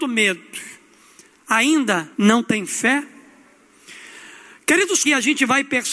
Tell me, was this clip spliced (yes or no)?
yes